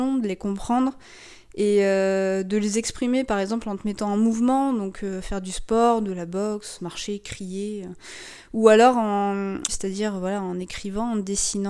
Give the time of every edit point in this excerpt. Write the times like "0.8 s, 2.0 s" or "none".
6.8 s, 9.7 s